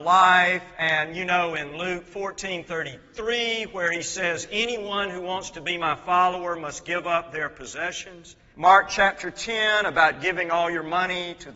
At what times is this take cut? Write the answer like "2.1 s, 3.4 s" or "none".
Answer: 8.5 s

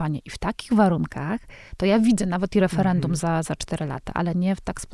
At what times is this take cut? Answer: none

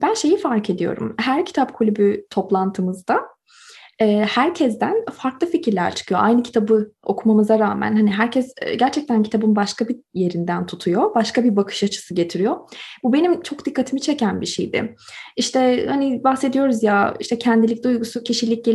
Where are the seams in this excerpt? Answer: none

